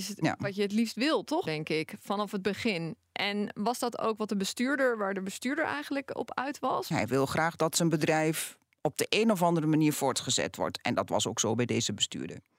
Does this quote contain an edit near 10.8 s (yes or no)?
no